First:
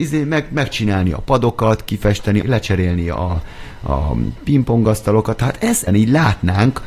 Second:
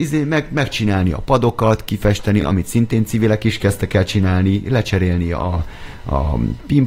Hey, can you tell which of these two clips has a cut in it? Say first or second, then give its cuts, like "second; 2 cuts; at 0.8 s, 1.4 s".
first; 2 cuts; at 2.4 s, 5.9 s